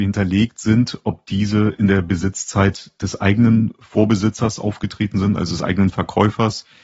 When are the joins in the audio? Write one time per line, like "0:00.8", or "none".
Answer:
none